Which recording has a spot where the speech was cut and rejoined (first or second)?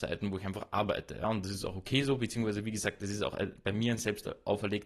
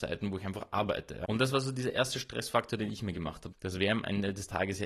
second